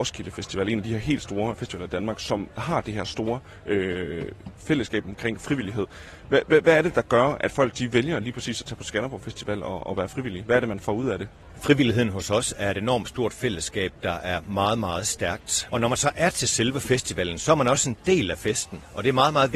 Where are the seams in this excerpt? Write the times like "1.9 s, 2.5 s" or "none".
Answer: 15.7 s